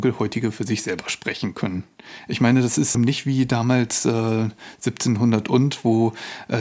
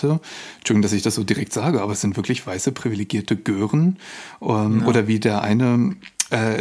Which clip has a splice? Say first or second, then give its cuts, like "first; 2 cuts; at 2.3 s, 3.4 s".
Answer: first; 1 cut; at 2.9 s